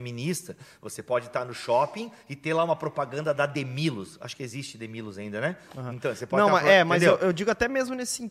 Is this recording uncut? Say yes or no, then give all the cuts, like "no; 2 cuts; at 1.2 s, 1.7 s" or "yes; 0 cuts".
yes; 0 cuts